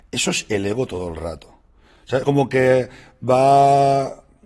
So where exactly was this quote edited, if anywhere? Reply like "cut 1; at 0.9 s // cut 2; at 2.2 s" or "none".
none